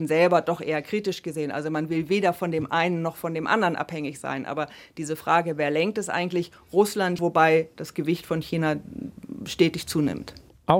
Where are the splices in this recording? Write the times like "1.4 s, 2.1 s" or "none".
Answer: 7.2 s

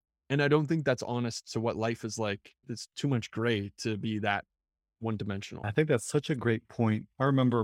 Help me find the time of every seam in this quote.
none

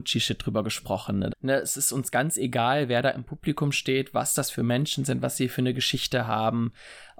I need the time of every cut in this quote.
1.3 s

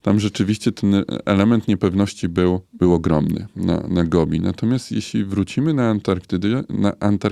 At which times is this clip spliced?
2.6 s

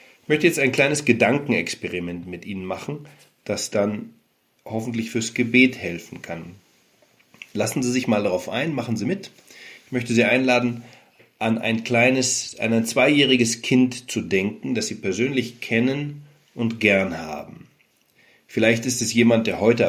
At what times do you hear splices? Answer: none

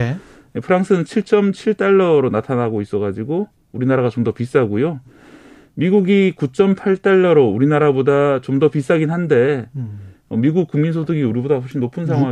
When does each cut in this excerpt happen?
none

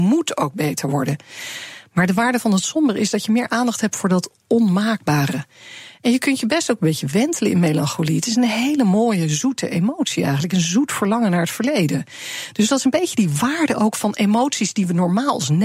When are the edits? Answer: none

